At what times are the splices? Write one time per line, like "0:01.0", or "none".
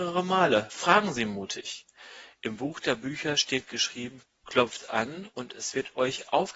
none